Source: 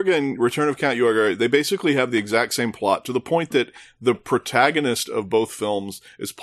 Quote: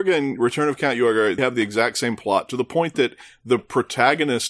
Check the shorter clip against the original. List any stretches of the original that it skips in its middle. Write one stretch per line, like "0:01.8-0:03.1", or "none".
0:01.4-0:01.9